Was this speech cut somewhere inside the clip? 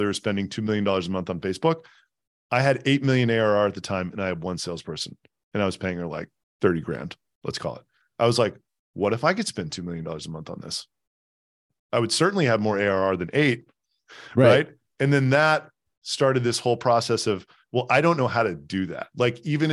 no; 0 cuts

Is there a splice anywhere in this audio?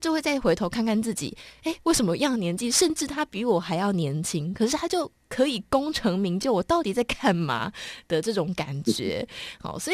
no; 0 cuts

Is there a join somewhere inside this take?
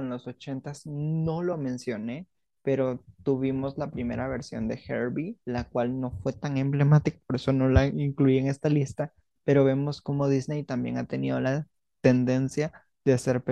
yes; 1 cut; at 5.4 s

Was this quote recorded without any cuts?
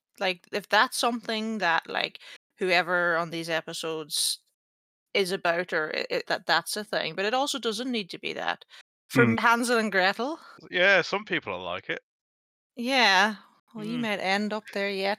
no; 2 cuts; at 6.2 s, 9.3 s

